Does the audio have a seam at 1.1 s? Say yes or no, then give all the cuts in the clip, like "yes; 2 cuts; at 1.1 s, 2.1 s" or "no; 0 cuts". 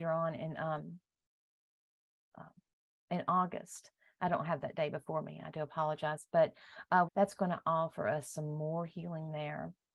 no; 1 cut; at 7.1 s